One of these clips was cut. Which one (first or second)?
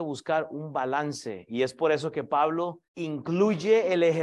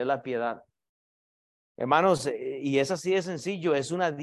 first